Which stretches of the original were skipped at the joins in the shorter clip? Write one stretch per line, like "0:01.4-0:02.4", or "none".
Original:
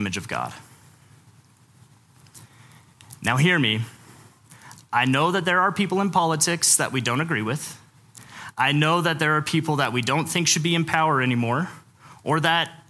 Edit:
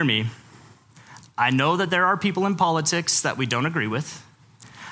none